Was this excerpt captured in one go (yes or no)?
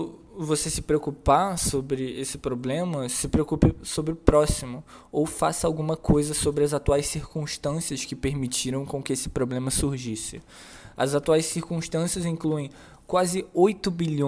yes